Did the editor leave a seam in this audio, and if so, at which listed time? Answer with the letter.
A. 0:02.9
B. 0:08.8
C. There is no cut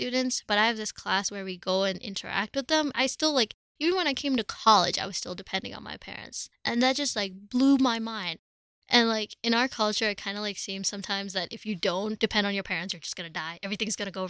A